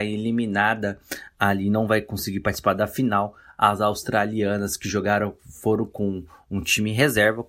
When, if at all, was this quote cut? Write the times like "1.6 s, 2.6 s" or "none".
none